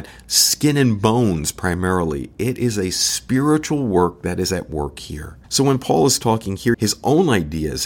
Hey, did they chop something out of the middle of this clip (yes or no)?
yes